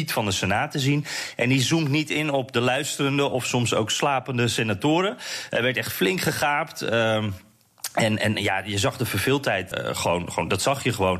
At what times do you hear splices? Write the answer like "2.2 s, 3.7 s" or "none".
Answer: 9.7 s